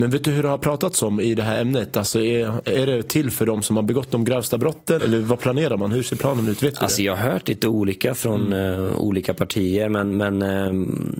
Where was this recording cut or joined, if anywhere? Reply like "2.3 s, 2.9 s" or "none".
5.0 s

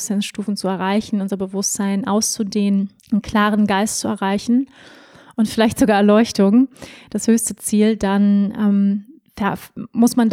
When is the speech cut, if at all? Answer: 3.0 s

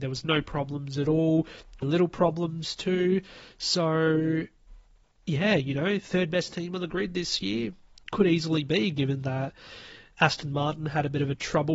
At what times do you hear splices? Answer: 1.8 s

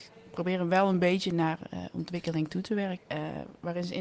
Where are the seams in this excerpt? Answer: 3.0 s

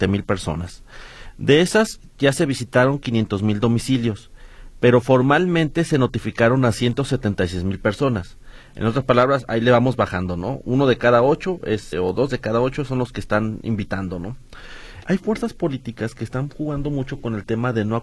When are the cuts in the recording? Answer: 11.9 s, 15.0 s

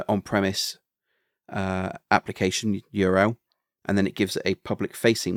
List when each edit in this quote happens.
none

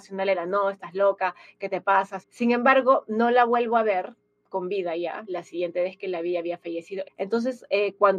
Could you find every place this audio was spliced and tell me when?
2.2 s, 7.0 s

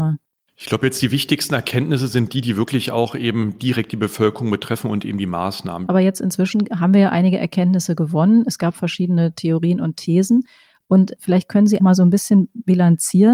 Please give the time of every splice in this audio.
5.9 s, 11.8 s

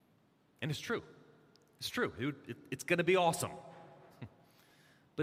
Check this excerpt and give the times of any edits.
none

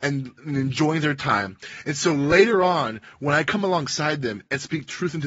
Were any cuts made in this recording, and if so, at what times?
none

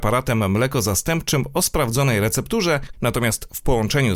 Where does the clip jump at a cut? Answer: 2.9 s

